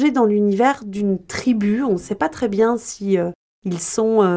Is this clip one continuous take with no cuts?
yes; 0 cuts

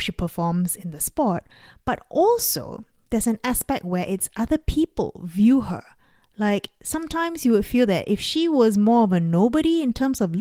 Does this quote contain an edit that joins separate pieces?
no; 0 cuts

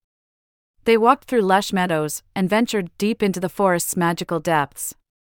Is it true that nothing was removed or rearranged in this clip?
no; 1 cut; at 2.3 s

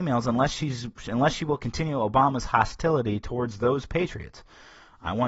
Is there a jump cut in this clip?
no; 0 cuts

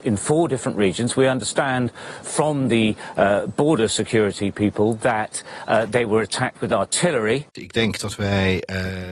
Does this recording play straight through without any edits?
no; 2 cuts; at 2.2 s, 7.6 s

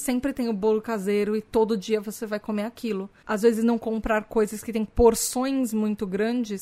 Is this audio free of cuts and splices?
yes; 0 cuts

